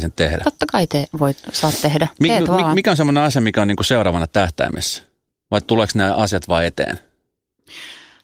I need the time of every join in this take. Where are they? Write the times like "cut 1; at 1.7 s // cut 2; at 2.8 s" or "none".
none

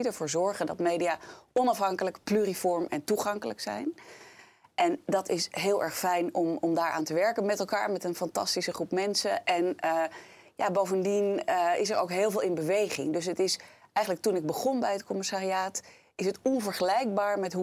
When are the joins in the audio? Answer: none

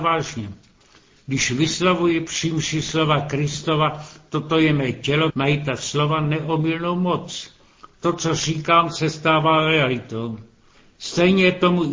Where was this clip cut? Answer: cut 1; at 5.3 s

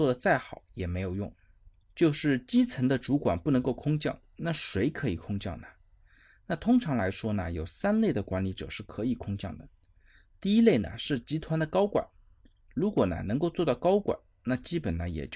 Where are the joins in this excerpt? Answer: cut 1; at 1.8 s

